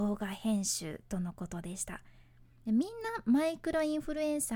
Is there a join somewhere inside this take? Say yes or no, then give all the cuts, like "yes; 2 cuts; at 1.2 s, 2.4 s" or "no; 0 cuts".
yes; 1 cut; at 2.6 s